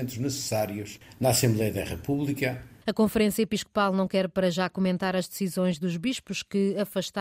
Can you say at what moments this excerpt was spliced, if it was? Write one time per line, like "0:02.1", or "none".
0:02.8